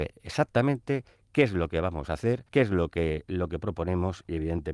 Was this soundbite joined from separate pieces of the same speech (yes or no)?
yes